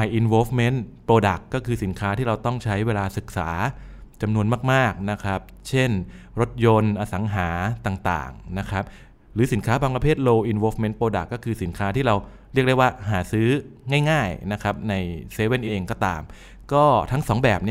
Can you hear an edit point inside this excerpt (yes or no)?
yes